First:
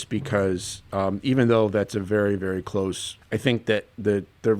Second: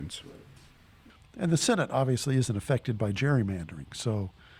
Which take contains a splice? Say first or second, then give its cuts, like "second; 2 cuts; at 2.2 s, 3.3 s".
first; 1 cut; at 3.2 s